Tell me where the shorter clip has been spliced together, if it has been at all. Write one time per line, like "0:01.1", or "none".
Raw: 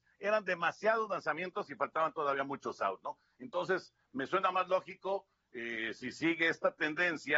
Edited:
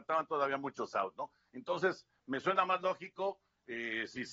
none

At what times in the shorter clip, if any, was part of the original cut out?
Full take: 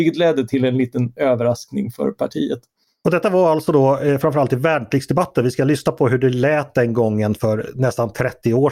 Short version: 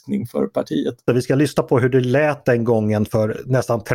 0:01.1

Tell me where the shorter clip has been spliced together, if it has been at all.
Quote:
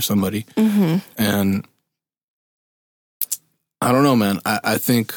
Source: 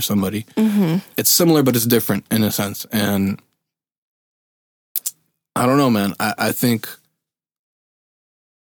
0:01.1

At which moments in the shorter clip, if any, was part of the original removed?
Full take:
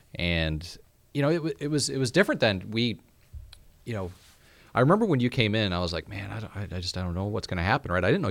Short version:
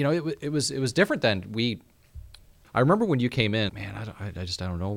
0:02.6
0:03.7

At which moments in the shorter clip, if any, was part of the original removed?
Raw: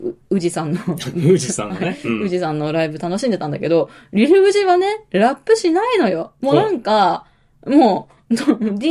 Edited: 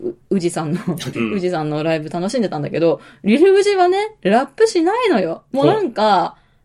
0:01.1

